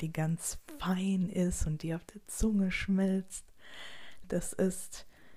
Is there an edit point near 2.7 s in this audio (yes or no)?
no